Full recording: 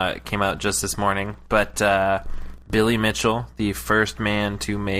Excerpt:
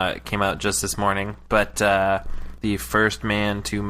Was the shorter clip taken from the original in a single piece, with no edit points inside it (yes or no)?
no